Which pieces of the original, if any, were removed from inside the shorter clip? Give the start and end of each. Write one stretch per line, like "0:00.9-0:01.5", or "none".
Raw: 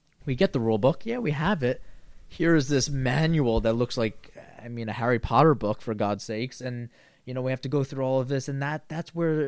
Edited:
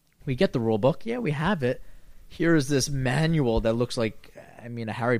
none